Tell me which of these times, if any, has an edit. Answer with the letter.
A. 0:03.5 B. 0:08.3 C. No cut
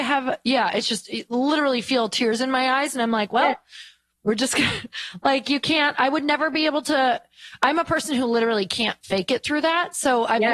C